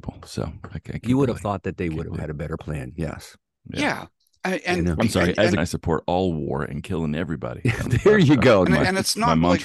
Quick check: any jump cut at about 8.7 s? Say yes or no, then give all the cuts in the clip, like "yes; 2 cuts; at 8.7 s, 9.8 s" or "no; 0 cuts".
yes; 2 cuts; at 5.6 s, 8.7 s